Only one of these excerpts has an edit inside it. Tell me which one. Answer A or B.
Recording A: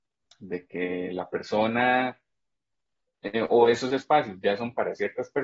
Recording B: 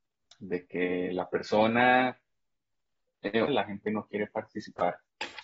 B